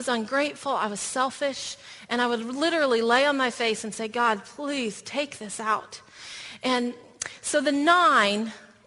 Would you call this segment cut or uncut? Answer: uncut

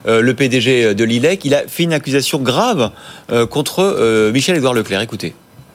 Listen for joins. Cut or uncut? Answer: uncut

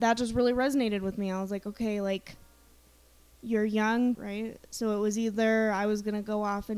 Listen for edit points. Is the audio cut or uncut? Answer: cut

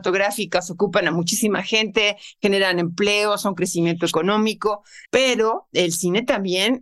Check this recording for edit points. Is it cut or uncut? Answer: cut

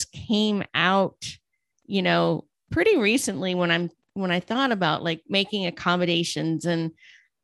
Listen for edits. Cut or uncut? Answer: uncut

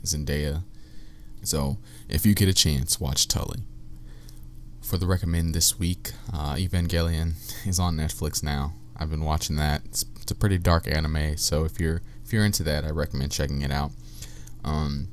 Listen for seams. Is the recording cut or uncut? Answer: cut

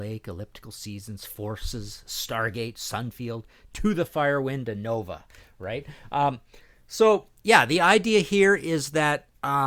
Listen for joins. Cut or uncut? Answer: uncut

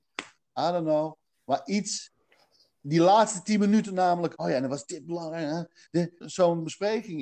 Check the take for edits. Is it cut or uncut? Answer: cut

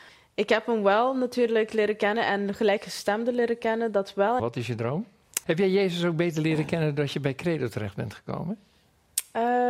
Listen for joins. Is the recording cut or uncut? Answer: cut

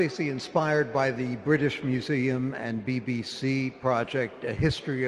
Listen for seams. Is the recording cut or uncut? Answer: uncut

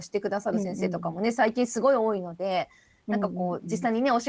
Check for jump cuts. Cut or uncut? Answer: uncut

